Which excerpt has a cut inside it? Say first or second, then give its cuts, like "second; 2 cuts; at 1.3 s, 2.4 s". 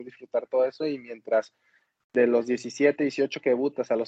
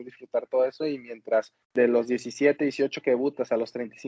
second; 1 cut; at 1.6 s